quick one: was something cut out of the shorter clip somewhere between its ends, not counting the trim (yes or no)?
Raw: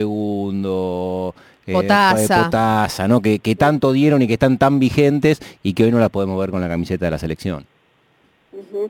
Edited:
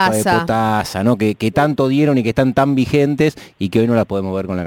no